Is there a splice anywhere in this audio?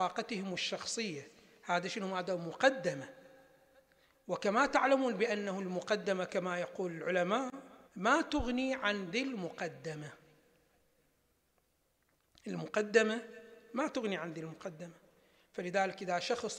yes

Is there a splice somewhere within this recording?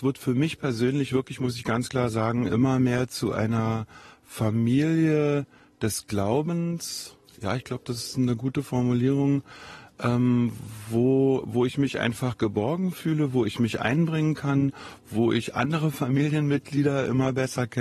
no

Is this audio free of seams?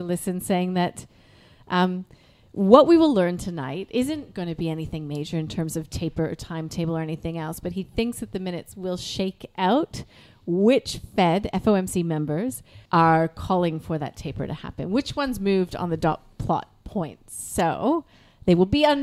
no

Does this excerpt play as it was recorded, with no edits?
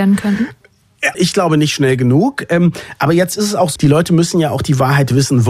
no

